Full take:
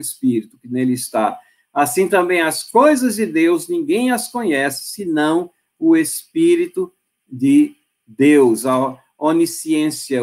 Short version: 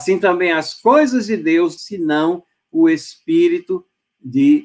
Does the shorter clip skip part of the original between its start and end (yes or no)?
yes